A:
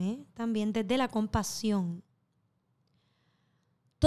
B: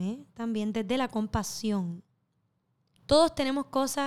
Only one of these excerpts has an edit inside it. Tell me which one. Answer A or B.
B